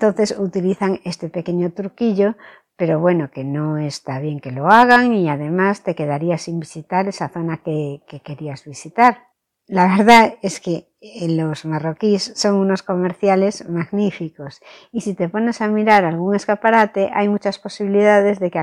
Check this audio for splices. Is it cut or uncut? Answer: uncut